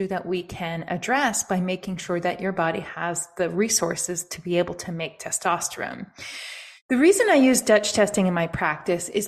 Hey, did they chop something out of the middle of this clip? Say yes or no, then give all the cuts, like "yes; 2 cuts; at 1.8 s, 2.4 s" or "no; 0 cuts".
yes; 1 cut; at 6.8 s